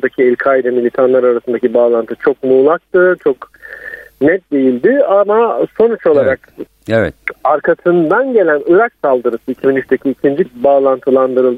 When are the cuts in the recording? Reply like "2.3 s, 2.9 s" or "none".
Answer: 6.7 s, 10.5 s